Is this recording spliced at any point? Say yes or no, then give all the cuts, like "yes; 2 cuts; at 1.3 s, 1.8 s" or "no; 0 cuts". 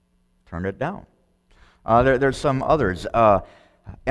no; 0 cuts